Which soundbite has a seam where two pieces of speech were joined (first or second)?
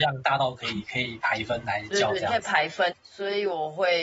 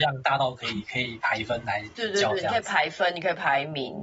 first